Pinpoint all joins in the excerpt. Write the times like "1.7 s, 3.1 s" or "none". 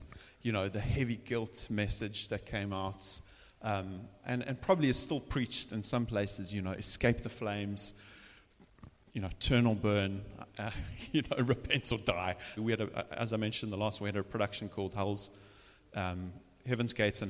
12.6 s